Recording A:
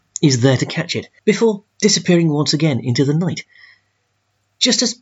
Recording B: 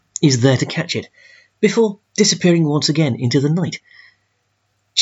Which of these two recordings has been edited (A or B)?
A